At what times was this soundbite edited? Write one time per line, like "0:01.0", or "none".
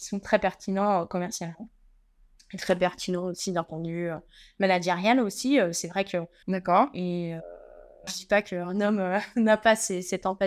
0:06.4
0:08.1